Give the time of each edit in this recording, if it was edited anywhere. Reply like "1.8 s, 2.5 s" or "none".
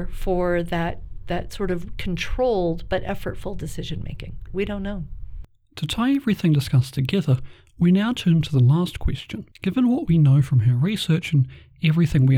4.5 s, 9.5 s